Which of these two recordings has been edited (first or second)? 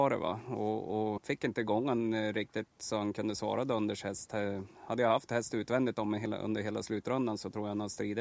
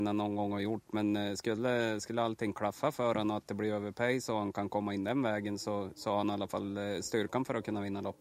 first